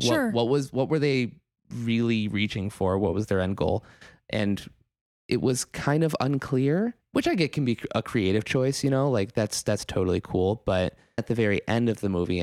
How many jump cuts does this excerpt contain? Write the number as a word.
one